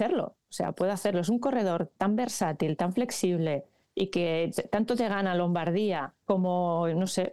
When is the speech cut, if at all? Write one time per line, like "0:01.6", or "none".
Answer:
0:06.2